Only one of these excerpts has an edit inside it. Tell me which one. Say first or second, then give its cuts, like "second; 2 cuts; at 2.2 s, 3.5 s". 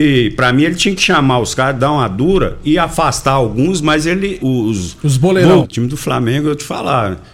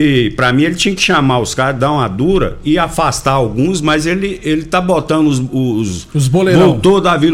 first; 2 cuts; at 4.4 s, 5.6 s